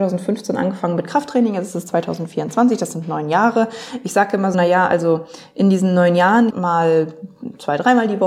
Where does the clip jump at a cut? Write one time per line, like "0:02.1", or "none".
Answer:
0:04.5
0:06.5